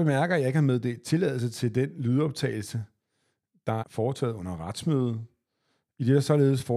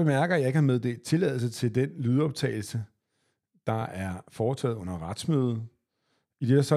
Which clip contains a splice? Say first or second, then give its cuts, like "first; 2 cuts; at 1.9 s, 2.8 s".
first; 1 cut; at 3.8 s